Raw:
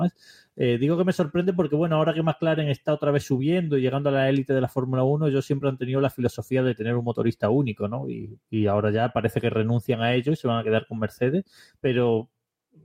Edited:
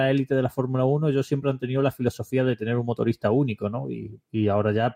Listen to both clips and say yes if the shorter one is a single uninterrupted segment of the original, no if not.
yes